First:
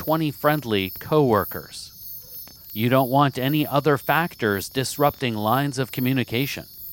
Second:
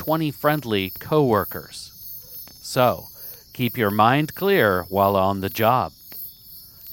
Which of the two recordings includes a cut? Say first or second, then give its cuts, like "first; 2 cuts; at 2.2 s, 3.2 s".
first; 1 cut; at 2.6 s